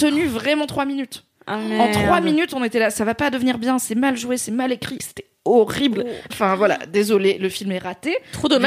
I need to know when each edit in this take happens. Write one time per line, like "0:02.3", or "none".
0:05.0
0:06.3